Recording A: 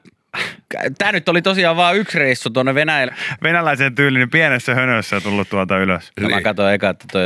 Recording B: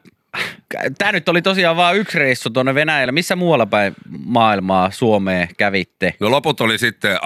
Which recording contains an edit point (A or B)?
A